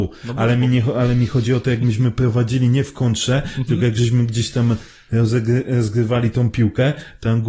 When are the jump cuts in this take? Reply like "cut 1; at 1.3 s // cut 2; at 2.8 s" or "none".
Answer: none